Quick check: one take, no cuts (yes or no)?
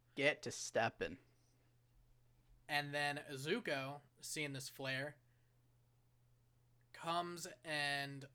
yes